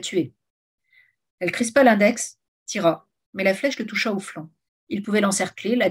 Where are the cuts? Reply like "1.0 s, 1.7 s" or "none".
1.3 s, 3.3 s, 4.7 s